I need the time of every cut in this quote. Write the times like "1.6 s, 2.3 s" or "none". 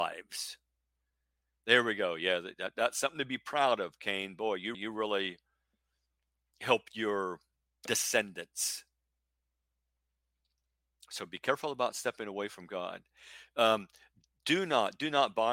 4.7 s